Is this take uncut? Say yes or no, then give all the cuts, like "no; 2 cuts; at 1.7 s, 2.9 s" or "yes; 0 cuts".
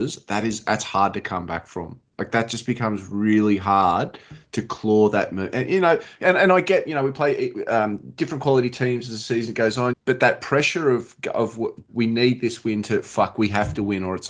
no; 2 cuts; at 9.9 s, 11.9 s